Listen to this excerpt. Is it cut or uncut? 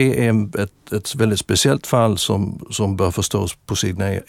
uncut